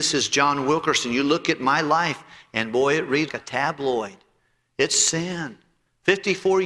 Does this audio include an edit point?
yes; 1 cut; at 3.3 s

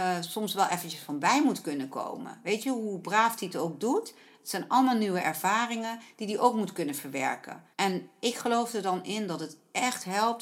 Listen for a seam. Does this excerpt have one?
yes; 1 cut; at 7.7 s

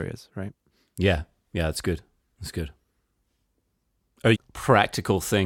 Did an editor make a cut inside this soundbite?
yes; 1 cut; at 4.3 s

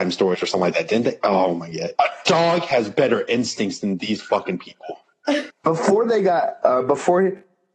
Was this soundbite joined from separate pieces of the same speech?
yes; 2 cuts; at 2.0 s, 5.5 s

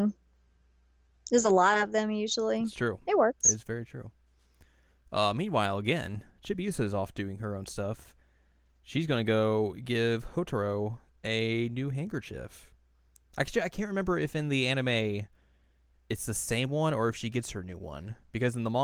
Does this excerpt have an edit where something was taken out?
no; 0 cuts

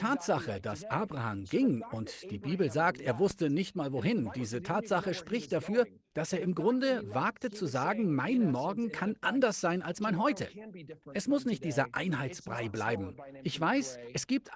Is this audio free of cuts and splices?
yes; 0 cuts

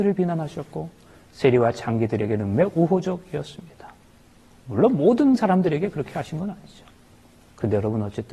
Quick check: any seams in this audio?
no; 0 cuts

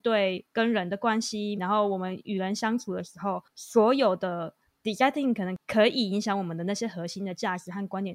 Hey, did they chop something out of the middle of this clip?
yes; 1 cut; at 1.6 s

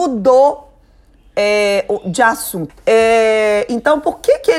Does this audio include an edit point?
yes; 1 cut; at 2.7 s

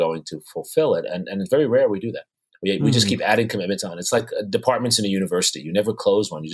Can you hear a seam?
no; 0 cuts

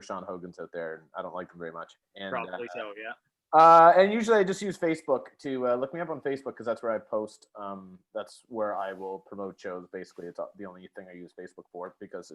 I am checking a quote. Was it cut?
no; 0 cuts

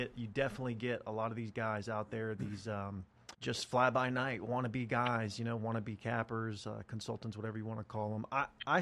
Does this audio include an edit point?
yes; 1 cut; at 3.3 s

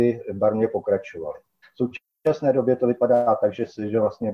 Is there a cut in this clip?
yes; 1 cut; at 1.6 s

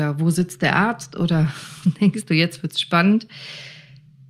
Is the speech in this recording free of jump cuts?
yes; 0 cuts

